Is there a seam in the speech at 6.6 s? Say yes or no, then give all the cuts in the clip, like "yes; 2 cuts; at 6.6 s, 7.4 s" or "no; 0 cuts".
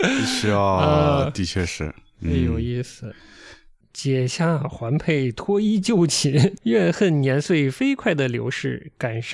yes; 2 cuts; at 3.8 s, 6.6 s